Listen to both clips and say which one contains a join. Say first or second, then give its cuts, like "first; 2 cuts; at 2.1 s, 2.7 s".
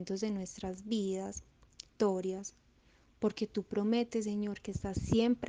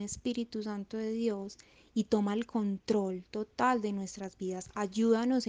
first; 1 cut; at 1.9 s